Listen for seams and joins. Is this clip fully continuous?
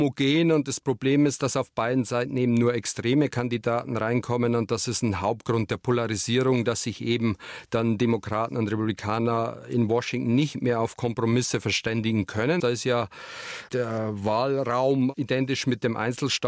no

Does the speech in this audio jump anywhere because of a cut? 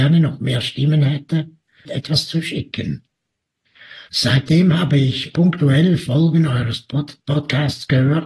yes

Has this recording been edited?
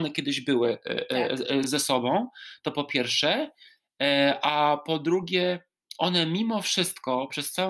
no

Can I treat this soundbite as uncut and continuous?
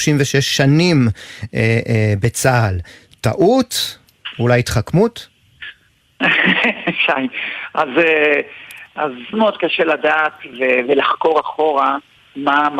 no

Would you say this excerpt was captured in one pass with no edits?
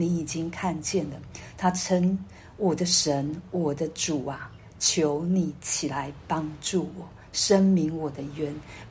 yes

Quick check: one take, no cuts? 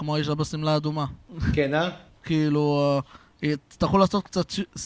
no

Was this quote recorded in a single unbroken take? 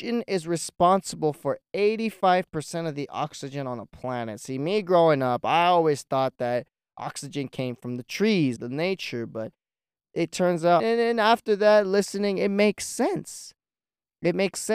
no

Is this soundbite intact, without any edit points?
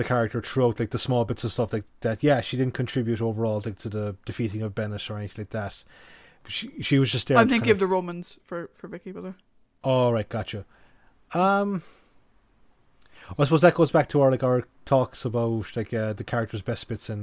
yes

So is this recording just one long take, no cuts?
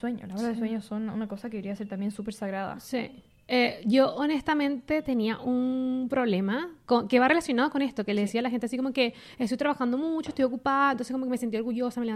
yes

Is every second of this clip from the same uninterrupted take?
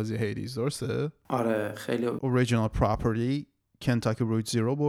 no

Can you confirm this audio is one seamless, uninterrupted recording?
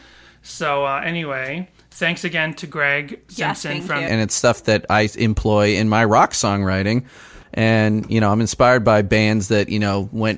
no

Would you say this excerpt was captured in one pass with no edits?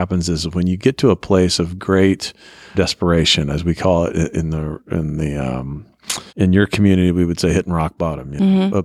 no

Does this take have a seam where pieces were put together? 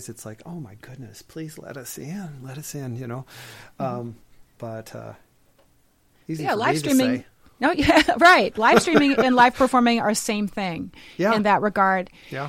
yes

